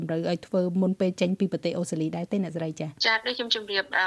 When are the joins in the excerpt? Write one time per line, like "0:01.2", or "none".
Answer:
0:03.0